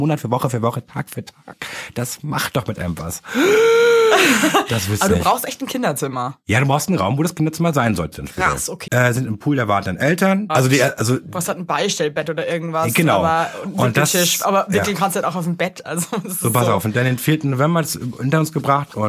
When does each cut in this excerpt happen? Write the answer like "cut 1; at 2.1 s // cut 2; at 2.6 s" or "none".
cut 1; at 8.9 s // cut 2; at 10.5 s

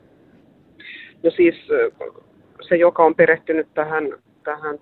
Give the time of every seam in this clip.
none

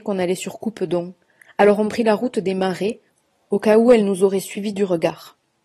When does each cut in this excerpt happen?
none

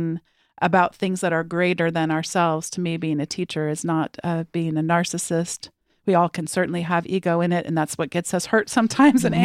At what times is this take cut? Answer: none

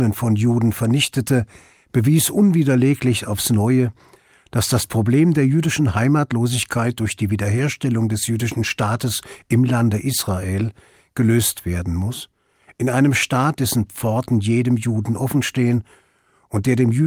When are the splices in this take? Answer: none

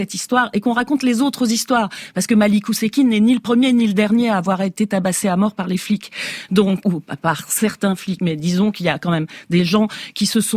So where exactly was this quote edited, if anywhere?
cut 1; at 6.8 s // cut 2; at 8.2 s

